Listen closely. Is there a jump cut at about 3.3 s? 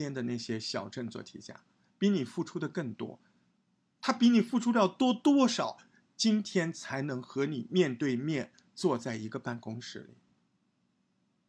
no; 0 cuts

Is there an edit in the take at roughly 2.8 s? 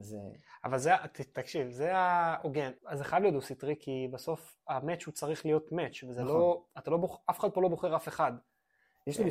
yes; 1 cut; at 2.8 s

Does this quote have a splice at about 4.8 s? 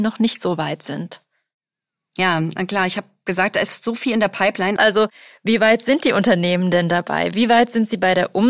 yes; 1 cut; at 4.8 s

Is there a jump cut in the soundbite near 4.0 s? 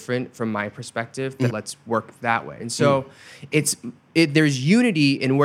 no; 2 cuts; at 1.5 s, 2.6 s

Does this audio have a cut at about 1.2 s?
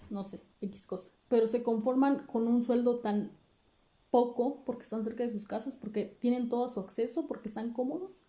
yes; 1 cut; at 1.2 s

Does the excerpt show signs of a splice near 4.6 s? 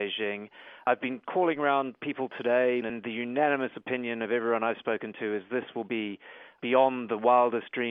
no; 2 cuts; at 2.8 s, 6.6 s

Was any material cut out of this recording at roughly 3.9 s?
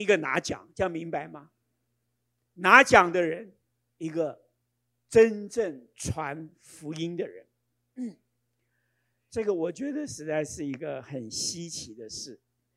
yes; 1 cut; at 3.9 s

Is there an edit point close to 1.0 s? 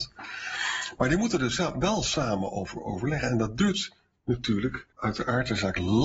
no; 1 cut; at 4.9 s

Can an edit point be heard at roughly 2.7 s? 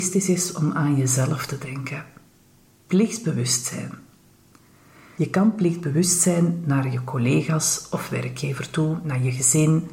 yes; 1 cut; at 2.7 s

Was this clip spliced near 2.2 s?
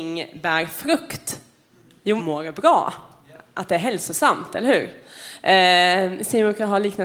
yes; 1 cut; at 2.2 s

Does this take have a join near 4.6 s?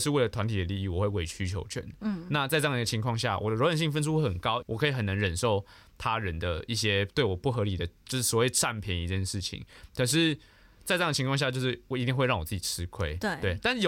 yes; 1 cut; at 4.6 s

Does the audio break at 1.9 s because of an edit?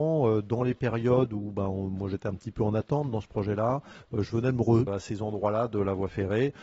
no; 1 cut; at 4.9 s

